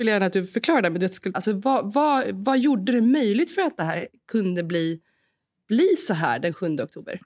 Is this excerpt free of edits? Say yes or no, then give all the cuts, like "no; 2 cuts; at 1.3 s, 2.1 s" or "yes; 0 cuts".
no; 1 cut; at 1.3 s